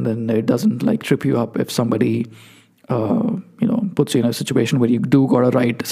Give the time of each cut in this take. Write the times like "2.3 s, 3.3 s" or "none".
none